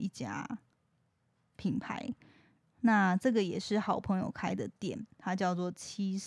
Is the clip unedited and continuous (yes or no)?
yes